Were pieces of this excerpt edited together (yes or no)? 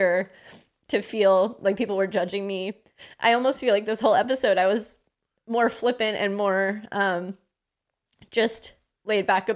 no